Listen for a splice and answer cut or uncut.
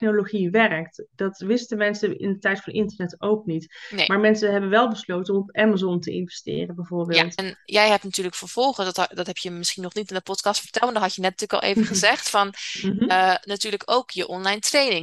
cut